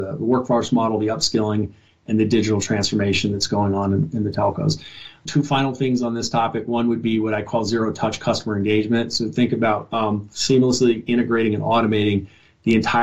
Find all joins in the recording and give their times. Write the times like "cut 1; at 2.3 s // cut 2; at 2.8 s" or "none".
none